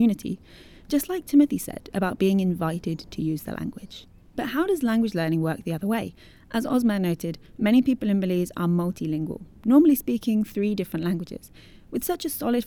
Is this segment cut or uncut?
uncut